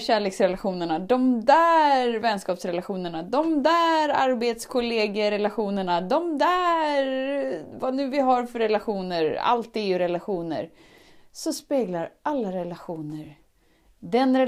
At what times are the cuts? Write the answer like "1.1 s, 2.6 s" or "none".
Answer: none